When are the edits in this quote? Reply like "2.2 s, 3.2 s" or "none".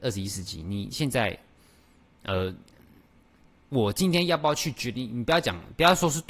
none